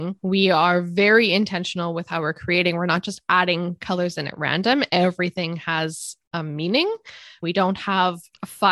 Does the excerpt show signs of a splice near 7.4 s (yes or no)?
yes